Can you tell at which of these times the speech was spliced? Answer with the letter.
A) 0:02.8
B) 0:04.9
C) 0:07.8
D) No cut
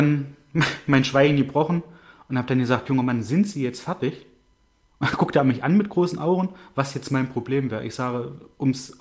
D